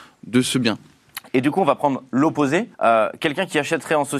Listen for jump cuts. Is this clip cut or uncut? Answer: cut